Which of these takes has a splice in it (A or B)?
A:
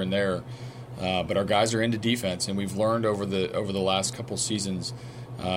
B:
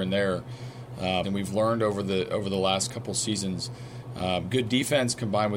B